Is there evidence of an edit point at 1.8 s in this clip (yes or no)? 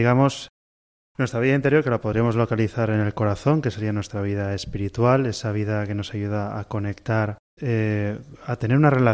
no